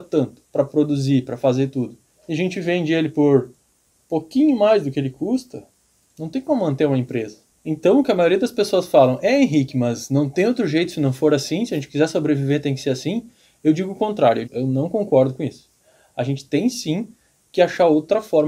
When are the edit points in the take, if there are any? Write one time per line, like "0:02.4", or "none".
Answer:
0:14.4